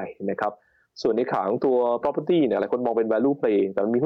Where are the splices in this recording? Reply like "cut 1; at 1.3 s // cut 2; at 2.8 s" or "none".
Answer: none